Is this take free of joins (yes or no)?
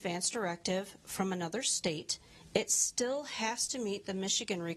yes